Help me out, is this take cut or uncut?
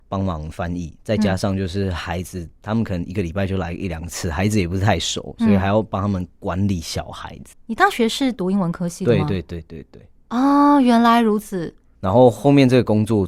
cut